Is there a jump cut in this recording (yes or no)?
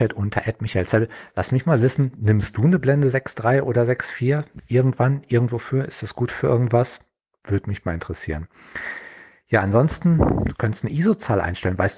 no